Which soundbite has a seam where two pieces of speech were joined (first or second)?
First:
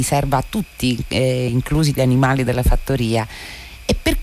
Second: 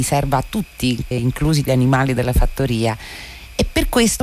second